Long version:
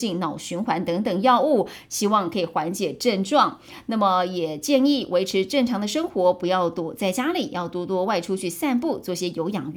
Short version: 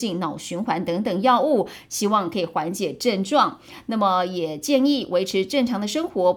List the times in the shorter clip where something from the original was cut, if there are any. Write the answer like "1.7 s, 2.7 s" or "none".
none